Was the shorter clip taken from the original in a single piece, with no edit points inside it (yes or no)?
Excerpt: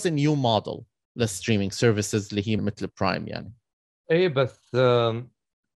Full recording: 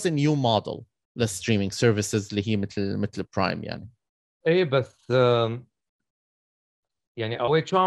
no